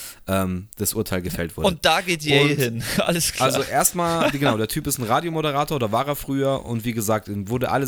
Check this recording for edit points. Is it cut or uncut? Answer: uncut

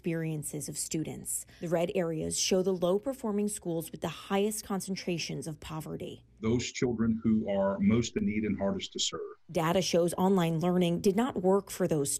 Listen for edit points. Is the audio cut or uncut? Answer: uncut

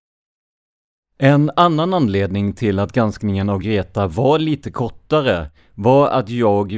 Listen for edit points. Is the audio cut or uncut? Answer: uncut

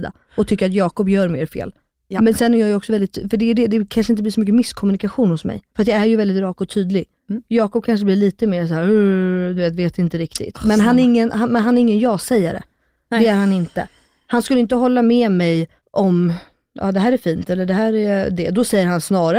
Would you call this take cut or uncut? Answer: uncut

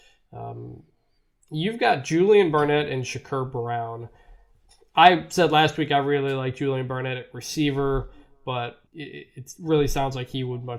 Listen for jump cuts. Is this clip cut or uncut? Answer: cut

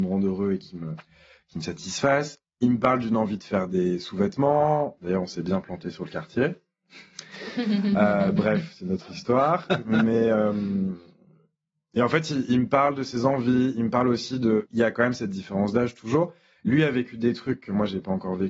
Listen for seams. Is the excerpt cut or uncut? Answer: cut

